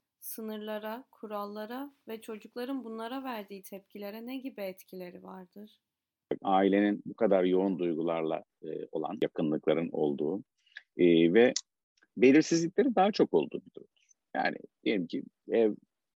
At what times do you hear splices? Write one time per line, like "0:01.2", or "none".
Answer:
none

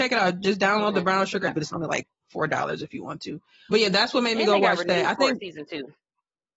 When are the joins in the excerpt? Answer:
0:01.5
0:03.7

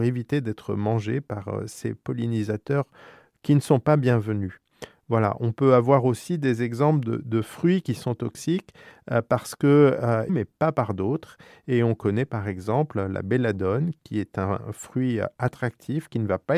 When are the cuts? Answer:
0:10.3

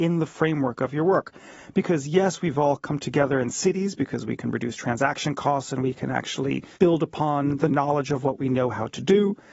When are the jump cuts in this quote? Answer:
0:06.7

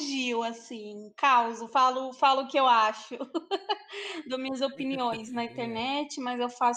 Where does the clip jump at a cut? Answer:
none

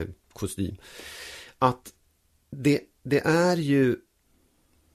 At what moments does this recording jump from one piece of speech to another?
none

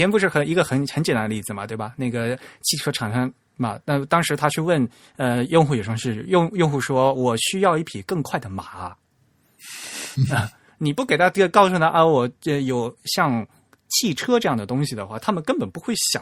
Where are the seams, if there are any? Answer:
none

